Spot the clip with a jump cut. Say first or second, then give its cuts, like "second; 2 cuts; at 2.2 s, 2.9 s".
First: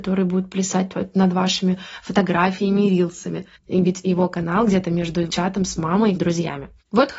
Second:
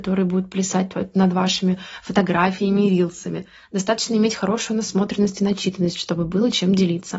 first; 2 cuts; at 3.6 s, 6.2 s